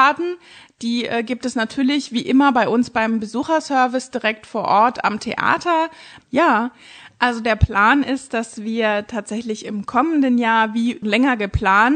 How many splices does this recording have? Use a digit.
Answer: 2